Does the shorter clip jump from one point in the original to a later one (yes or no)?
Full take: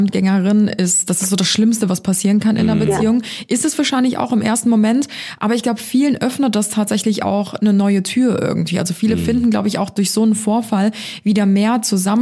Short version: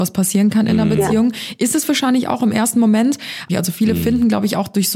yes